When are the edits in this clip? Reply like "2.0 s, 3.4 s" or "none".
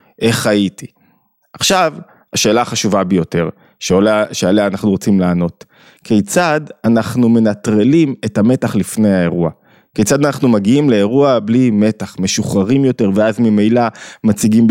none